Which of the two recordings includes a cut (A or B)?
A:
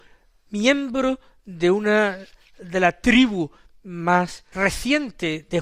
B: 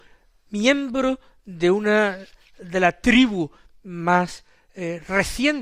A